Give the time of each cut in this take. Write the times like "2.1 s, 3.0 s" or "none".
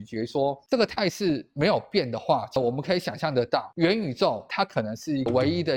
none

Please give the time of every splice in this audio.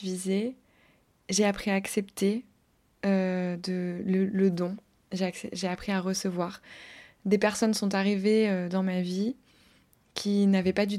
none

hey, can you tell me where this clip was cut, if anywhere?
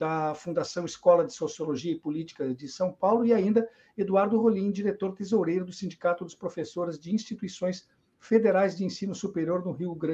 none

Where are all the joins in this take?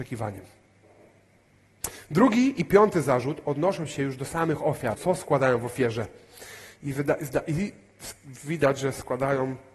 4.9 s

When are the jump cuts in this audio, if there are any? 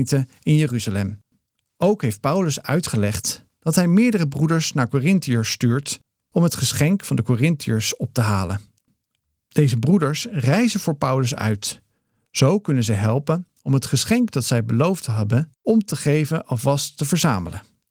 1.7 s

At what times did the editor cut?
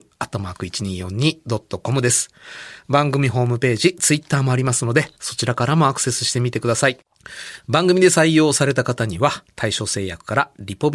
none

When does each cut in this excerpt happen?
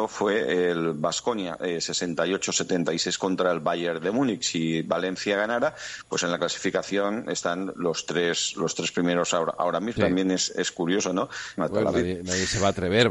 10.0 s, 11.6 s

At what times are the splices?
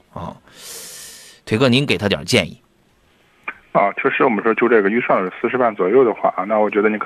none

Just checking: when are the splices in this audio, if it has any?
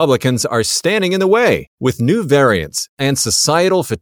1.7 s, 2.9 s

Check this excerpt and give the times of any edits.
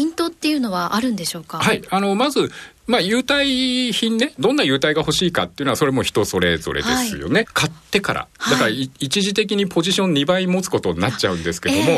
7.5 s

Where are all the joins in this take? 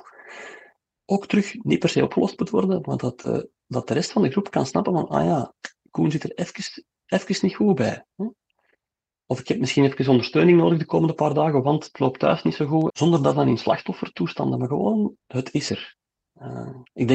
12.9 s, 15.2 s

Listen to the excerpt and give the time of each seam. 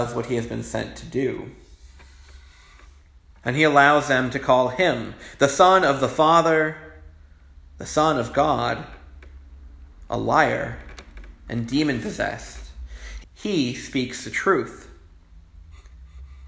3.3 s, 13.2 s

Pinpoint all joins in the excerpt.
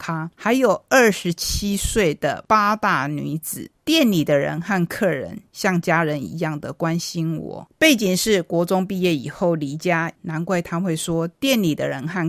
7.7 s, 10.2 s

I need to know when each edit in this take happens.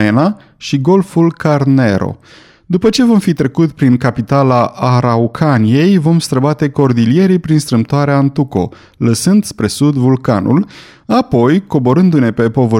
none

